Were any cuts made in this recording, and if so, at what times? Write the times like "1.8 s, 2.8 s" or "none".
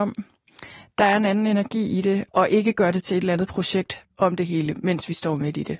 2.3 s, 4.0 s